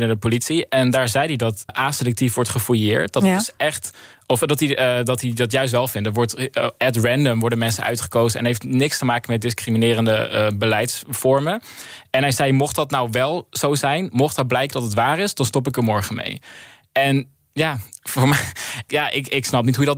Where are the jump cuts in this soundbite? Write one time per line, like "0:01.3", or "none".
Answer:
0:01.7
0:18.9